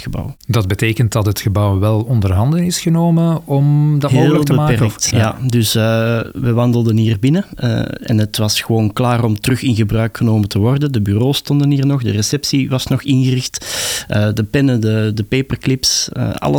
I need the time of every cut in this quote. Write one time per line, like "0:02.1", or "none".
0:05.1